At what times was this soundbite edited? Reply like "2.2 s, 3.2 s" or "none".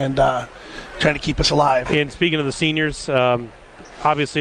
1.9 s